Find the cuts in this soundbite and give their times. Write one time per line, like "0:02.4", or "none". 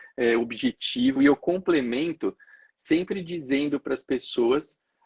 none